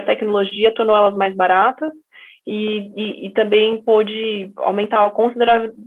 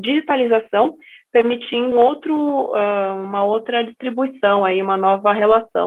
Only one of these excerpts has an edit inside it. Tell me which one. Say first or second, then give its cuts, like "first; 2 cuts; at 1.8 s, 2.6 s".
second; 1 cut; at 1.9 s